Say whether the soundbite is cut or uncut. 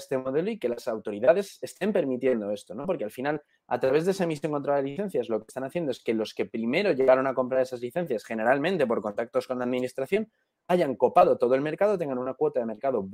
uncut